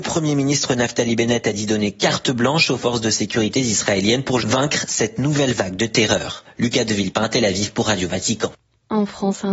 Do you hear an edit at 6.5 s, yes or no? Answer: no